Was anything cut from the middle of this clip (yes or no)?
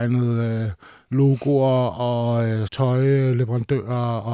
yes